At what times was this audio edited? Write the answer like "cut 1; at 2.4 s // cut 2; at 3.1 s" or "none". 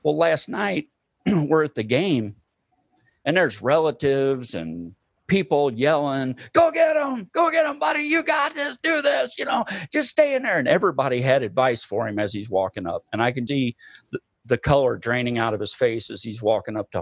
cut 1; at 13.5 s